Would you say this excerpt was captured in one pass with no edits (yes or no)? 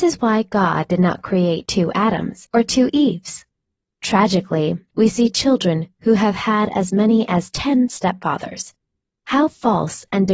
no